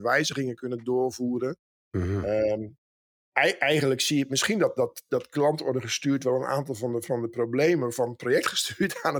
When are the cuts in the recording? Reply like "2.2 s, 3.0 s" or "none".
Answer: 1.8 s